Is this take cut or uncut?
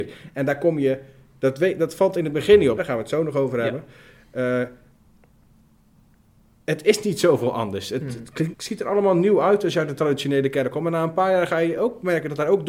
cut